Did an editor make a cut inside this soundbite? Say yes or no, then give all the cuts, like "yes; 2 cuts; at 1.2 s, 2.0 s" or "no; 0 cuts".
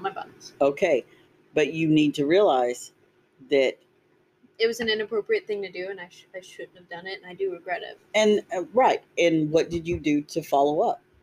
no; 0 cuts